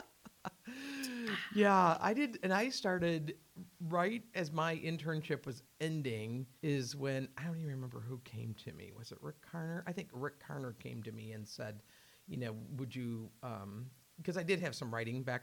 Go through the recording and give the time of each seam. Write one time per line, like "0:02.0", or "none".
0:06.6